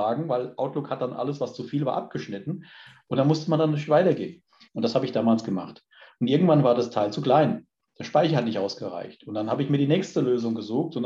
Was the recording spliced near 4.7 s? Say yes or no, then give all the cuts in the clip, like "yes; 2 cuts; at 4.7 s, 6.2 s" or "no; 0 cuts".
yes; 1 cut; at 4.7 s